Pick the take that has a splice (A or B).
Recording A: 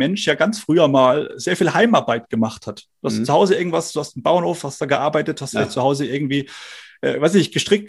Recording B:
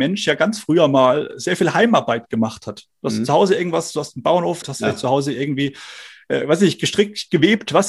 B